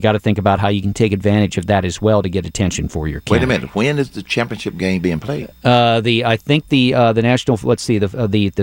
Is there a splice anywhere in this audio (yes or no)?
no